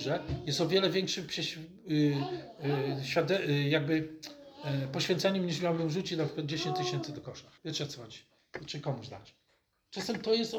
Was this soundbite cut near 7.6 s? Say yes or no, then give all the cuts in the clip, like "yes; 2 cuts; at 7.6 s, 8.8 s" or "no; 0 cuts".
yes; 1 cut; at 7.6 s